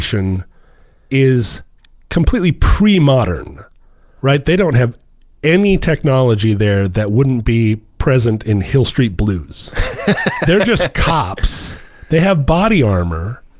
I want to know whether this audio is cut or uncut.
uncut